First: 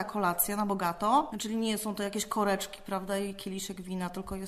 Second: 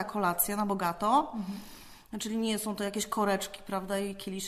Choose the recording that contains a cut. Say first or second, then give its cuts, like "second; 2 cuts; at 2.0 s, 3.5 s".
first; 1 cut; at 1.3 s